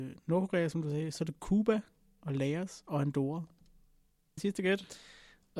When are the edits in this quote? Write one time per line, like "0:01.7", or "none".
0:04.4